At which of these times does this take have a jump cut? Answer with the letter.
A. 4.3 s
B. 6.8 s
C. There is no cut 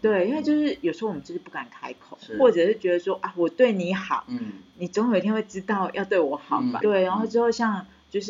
B